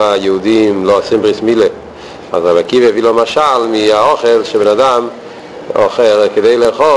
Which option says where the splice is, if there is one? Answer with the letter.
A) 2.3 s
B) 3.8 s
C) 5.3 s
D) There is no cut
A